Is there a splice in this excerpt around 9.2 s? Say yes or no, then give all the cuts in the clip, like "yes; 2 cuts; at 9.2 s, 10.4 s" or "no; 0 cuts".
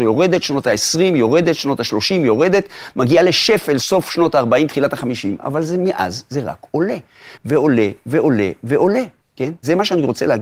yes; 2 cuts; at 7.4 s, 9.2 s